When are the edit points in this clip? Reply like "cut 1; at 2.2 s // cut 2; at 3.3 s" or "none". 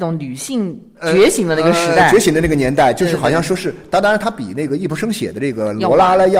none